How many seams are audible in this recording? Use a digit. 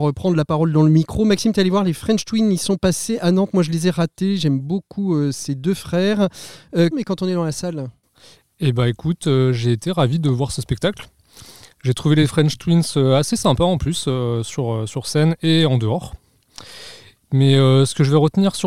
1